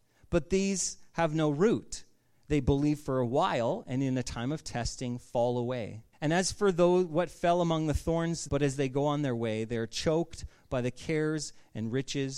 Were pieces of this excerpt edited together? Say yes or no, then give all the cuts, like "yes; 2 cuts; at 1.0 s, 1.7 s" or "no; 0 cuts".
yes; 2 cuts; at 6.1 s, 8.5 s